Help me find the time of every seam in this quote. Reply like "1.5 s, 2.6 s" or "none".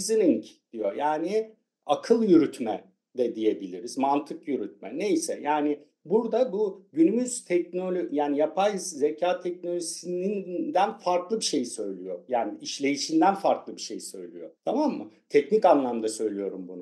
14.6 s